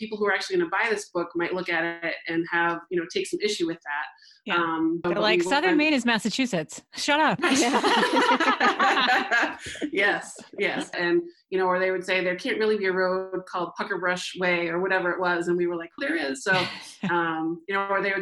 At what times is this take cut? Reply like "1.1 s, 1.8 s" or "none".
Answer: 5.0 s, 10.9 s, 16.0 s